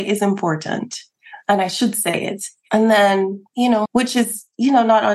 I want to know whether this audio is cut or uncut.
cut